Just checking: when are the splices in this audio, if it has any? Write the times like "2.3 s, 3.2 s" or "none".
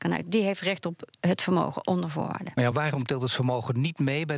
2.7 s